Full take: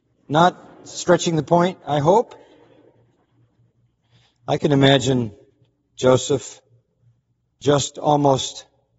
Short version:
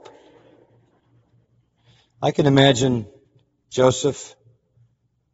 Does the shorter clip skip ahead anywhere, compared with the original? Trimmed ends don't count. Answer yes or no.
no